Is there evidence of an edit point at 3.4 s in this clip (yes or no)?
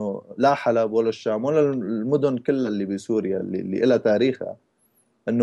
no